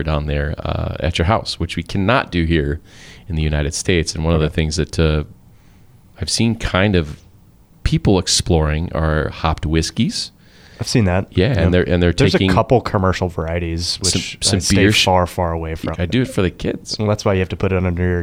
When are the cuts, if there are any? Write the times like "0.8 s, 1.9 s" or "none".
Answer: 15.9 s